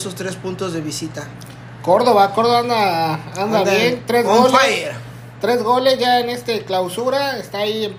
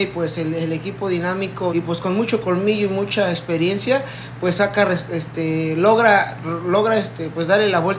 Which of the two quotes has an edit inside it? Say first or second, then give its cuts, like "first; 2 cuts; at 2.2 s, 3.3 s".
second; 1 cut; at 1.7 s